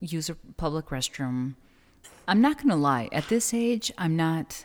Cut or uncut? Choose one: cut